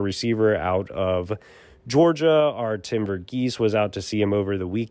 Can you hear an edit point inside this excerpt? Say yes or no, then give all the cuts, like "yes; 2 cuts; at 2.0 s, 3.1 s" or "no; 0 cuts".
no; 0 cuts